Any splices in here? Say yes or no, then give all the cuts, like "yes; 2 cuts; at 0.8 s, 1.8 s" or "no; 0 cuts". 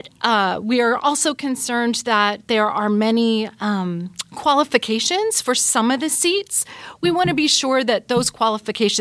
no; 0 cuts